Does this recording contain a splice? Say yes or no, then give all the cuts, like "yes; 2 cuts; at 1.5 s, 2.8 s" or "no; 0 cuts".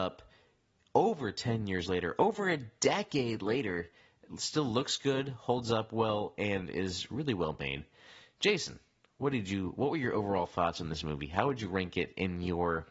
no; 0 cuts